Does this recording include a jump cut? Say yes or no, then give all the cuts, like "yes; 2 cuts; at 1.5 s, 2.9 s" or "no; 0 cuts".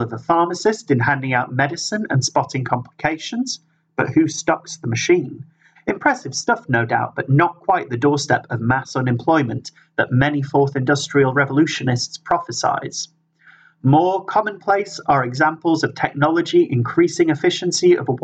yes; 1 cut; at 5.8 s